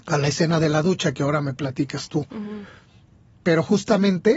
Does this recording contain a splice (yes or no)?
no